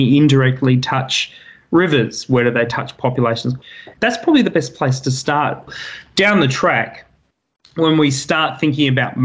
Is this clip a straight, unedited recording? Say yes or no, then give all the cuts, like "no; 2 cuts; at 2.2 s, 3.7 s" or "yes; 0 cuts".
no; 1 cut; at 3.9 s